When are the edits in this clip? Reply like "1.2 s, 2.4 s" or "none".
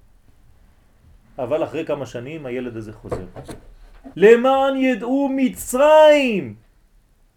1.2 s, 4.1 s